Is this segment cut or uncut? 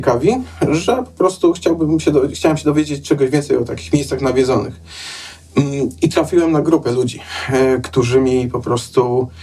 uncut